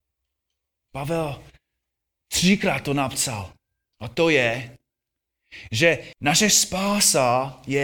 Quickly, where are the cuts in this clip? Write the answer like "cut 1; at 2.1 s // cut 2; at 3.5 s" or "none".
cut 1; at 3.9 s // cut 2; at 6.1 s